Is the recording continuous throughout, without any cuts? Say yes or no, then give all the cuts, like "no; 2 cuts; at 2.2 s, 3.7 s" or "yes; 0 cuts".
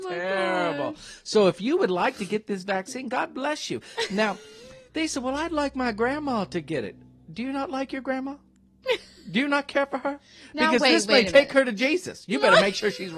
no; 1 cut; at 4.9 s